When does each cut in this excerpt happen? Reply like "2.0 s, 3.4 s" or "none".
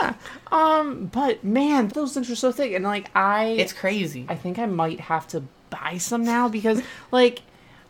1.9 s, 4.3 s